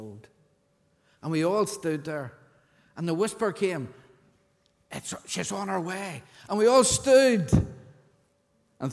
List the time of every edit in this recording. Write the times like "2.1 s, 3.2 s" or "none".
none